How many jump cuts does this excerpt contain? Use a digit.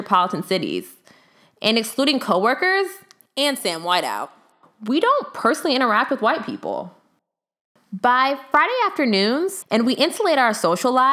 1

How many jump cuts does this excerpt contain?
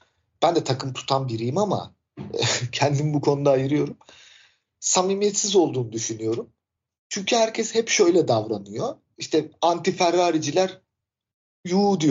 1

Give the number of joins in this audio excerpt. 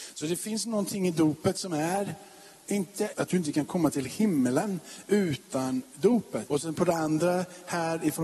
2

